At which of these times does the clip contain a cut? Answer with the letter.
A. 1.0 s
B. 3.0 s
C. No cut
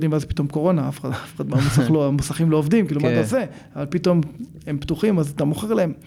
C